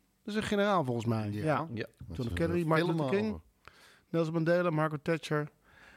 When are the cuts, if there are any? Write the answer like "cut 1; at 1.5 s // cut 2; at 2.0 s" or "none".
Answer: none